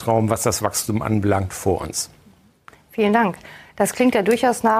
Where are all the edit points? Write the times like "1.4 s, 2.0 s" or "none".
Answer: none